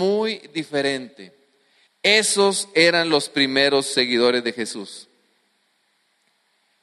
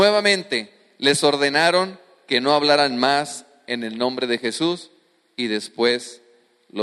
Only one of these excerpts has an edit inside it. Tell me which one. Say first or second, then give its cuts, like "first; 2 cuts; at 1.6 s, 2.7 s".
first; 1 cut; at 1.9 s